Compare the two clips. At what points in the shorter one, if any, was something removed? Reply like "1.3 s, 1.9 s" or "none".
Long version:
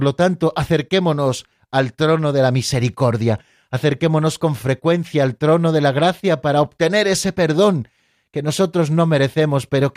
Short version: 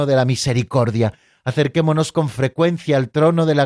none